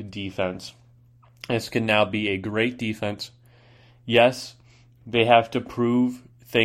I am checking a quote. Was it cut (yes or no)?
no